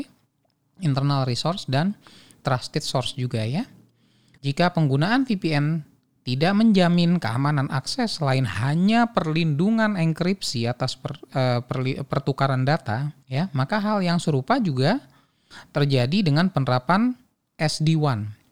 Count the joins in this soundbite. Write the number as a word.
two